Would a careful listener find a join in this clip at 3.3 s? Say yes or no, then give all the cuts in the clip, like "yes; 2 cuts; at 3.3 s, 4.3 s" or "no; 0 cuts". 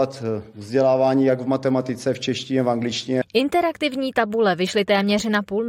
yes; 1 cut; at 3.3 s